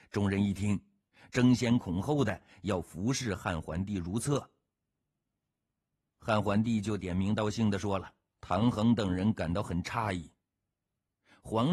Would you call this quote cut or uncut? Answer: cut